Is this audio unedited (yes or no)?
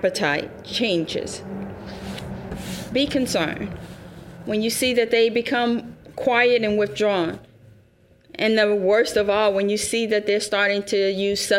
yes